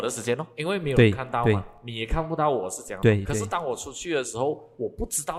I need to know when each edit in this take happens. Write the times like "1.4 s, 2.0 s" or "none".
none